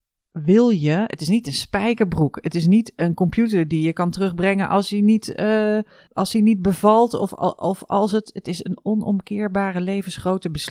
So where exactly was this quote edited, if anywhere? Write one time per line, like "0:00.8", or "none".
0:06.1